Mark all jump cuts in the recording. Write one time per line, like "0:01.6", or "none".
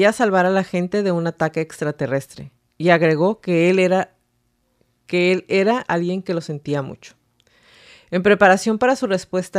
0:05.9